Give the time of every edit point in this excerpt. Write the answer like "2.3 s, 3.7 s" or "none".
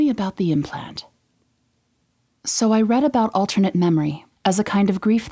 4.3 s